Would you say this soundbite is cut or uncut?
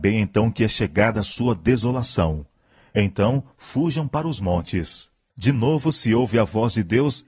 cut